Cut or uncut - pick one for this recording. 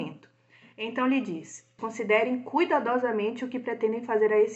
cut